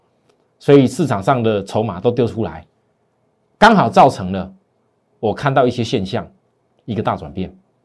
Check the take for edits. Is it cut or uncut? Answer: uncut